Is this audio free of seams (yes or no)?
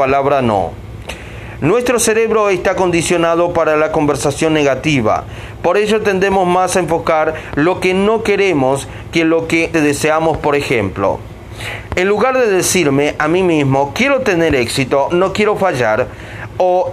no